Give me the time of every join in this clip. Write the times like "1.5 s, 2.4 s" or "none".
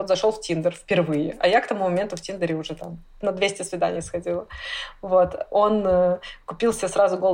none